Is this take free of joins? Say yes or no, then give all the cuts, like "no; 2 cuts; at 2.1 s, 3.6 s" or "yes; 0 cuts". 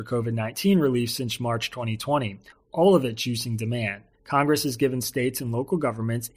no; 2 cuts; at 2.5 s, 4.1 s